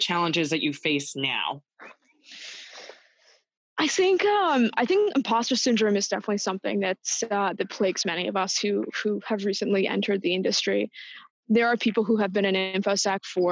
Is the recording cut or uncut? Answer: uncut